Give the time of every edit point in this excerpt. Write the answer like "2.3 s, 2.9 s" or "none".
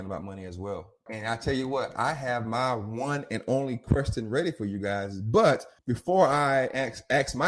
1.1 s, 5.8 s

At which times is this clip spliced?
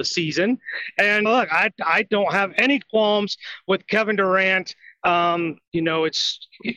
1.2 s

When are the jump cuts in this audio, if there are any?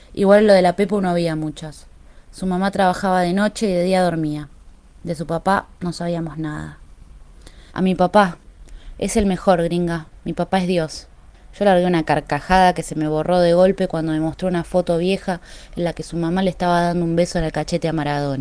7.7 s

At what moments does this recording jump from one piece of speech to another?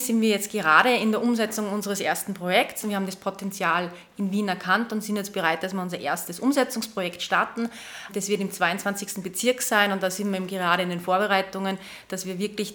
2.8 s

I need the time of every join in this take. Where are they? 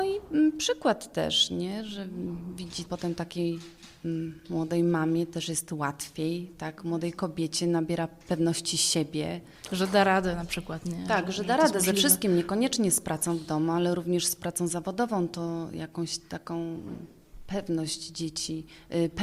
2.9 s

